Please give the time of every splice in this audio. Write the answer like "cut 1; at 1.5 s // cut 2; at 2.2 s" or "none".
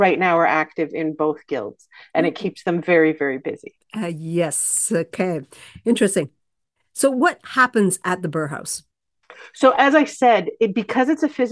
none